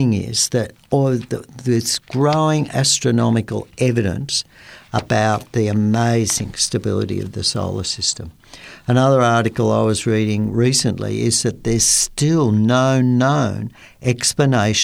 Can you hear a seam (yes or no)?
no